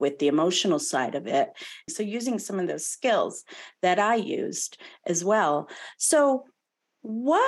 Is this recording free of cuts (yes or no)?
no